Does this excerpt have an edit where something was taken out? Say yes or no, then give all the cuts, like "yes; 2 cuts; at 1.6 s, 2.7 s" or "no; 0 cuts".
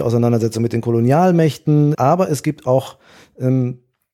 yes; 1 cut; at 1.9 s